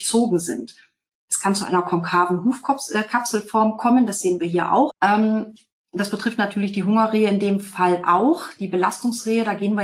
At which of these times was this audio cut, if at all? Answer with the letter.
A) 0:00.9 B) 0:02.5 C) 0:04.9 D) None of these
C